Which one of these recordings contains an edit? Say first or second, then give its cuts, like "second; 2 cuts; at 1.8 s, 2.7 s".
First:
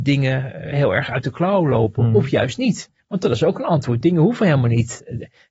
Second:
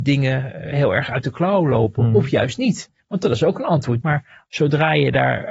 second; 1 cut; at 4.0 s